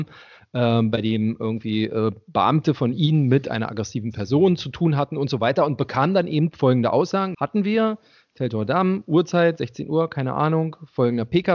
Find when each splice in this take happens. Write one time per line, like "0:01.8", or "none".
0:07.3